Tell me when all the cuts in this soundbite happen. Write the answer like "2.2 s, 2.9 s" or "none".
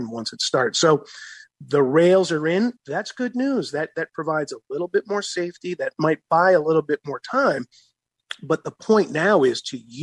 none

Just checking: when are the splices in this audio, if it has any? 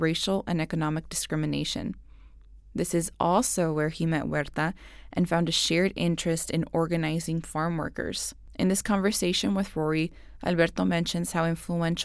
none

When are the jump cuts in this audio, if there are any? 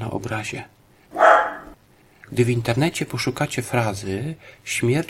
2.2 s

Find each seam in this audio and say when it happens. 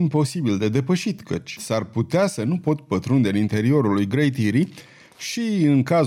1.6 s

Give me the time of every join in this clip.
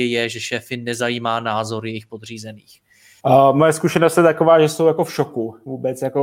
3.2 s

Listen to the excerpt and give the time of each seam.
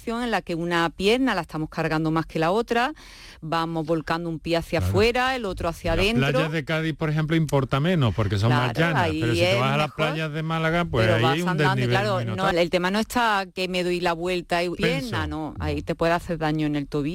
12.5 s, 14.8 s

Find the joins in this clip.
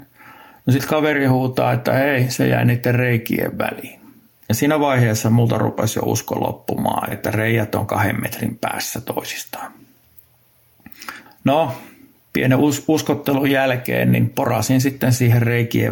7.1 s, 11.3 s

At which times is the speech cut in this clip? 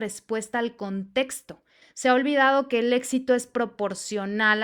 1.8 s

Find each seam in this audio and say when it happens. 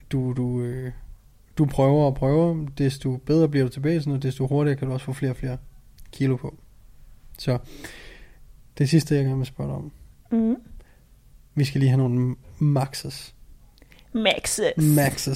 none

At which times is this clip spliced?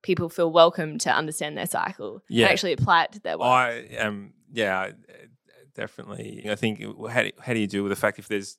6.4 s

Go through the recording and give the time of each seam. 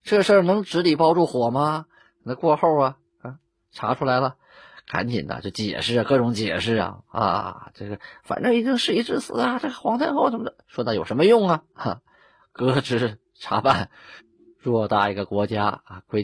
none

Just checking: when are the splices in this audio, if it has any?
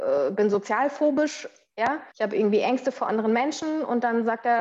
2.1 s

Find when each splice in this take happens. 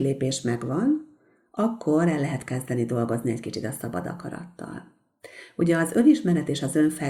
none

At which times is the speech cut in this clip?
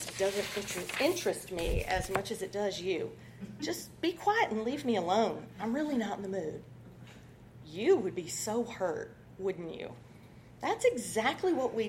none

